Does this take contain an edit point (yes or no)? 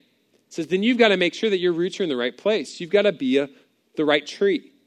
no